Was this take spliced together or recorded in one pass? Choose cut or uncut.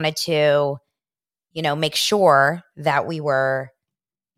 uncut